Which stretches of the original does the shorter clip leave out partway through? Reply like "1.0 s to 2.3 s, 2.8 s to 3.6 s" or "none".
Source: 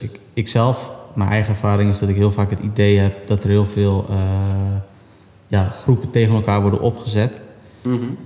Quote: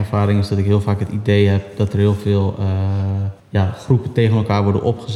4.9 s to 5.4 s